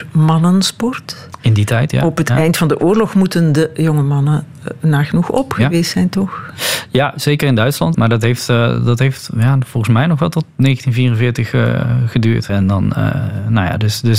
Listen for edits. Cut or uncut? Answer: cut